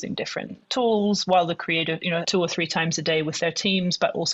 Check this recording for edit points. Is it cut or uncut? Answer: cut